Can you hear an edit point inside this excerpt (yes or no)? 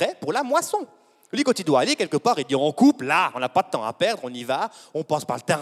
no